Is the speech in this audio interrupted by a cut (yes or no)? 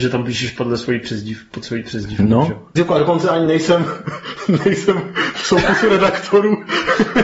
yes